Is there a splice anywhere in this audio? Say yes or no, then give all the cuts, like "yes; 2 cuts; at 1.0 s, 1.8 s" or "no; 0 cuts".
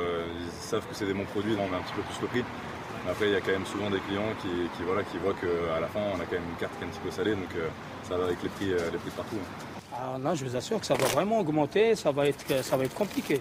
yes; 1 cut; at 1.6 s